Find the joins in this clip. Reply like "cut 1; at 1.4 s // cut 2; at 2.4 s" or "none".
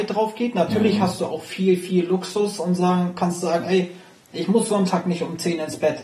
none

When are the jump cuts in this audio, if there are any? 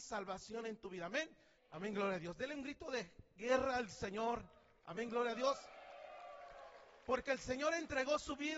cut 1; at 1.6 s

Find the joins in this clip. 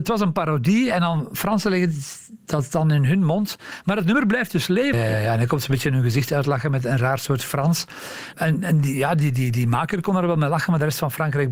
cut 1; at 4.9 s // cut 2; at 8.3 s

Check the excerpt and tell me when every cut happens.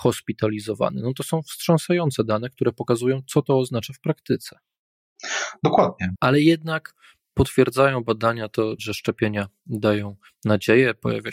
cut 1; at 6.1 s // cut 2; at 8.8 s

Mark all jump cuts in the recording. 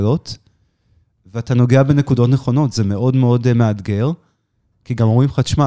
cut 1; at 4.7 s

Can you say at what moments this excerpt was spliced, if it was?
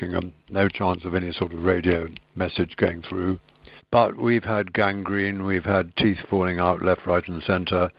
cut 1; at 3.8 s

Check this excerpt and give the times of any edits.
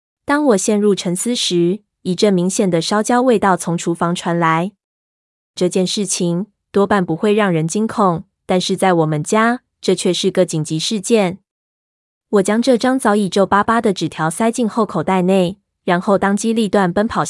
cut 1; at 5.6 s

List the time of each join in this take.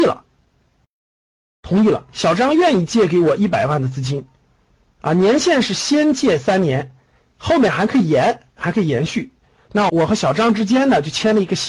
cut 1; at 9.9 s

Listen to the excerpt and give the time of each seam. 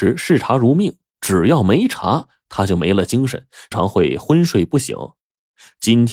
cut 1; at 3.7 s

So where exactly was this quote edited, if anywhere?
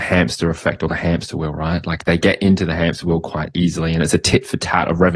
none

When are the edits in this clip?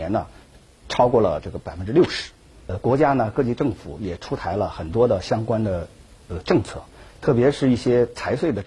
none

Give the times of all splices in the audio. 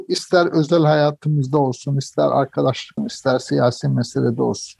cut 1; at 3.0 s

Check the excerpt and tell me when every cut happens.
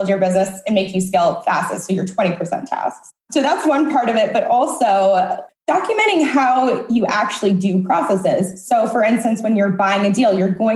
cut 1; at 5.5 s

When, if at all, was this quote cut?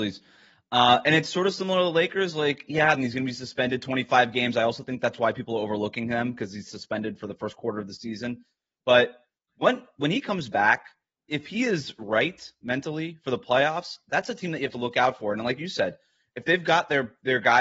cut 1; at 3.0 s

